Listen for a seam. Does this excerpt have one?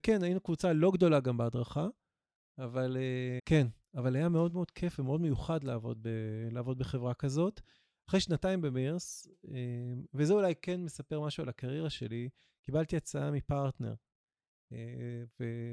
yes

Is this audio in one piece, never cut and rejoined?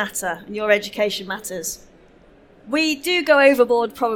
yes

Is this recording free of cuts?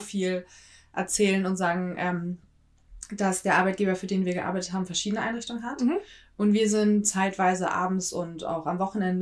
yes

